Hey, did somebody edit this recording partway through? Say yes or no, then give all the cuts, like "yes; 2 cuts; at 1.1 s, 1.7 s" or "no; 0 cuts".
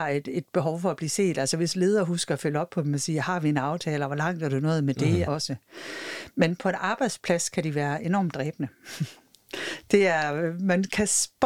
yes; 1 cut; at 5.3 s